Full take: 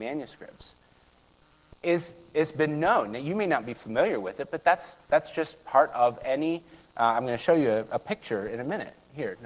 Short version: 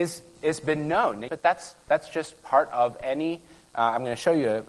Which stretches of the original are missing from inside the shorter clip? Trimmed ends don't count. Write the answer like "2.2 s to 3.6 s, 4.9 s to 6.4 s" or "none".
3.2 s to 4.5 s